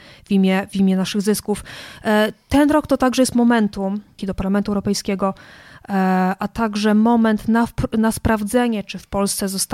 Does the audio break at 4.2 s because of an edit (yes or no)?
yes